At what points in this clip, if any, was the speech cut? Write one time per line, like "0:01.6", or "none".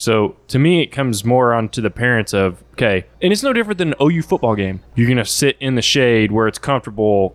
0:03.1
0:04.9